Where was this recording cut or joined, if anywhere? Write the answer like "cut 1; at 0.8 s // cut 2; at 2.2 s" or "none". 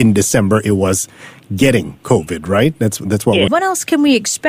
cut 1; at 3.5 s